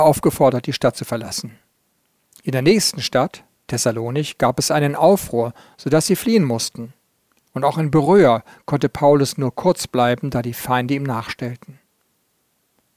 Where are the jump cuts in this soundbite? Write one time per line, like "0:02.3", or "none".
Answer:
none

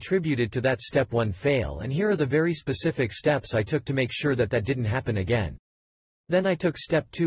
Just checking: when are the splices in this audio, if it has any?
none

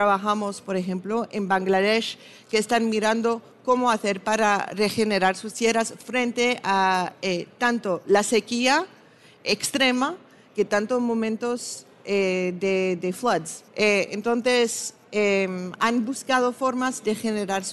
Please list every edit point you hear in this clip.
0:13.7

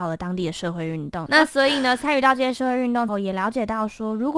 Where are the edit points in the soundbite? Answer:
0:01.3
0:03.1

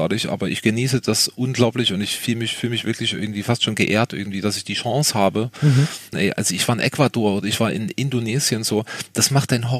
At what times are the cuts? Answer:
0:06.1

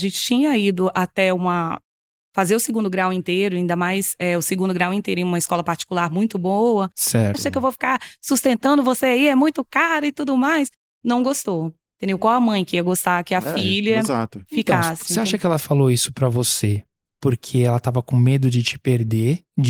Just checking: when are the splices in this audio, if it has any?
0:07.3

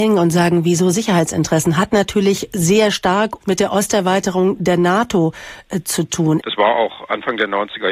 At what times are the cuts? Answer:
0:03.4
0:06.4

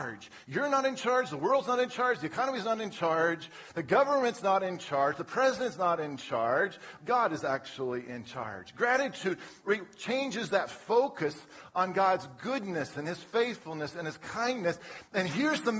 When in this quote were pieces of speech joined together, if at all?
0:07.0

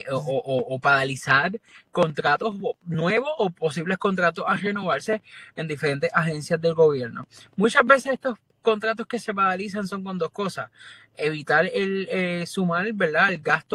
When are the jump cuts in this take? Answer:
none

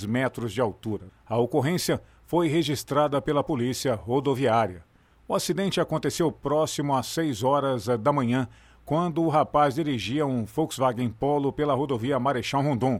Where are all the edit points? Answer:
0:01.1

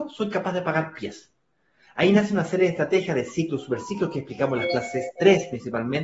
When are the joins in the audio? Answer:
none

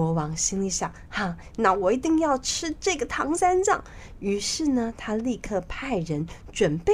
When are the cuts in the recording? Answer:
0:01.5

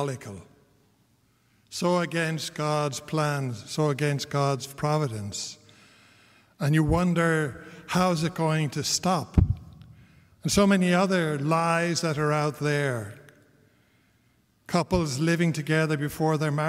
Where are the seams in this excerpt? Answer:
none

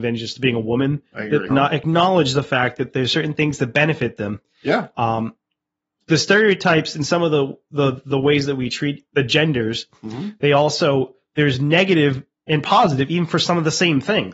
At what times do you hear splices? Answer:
0:01.5
0:09.1

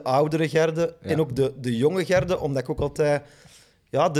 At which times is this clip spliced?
none

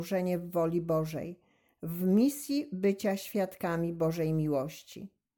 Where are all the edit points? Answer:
none

